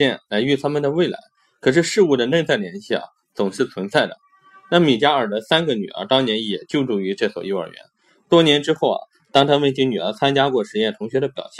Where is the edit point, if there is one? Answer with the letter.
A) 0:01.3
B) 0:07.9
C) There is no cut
C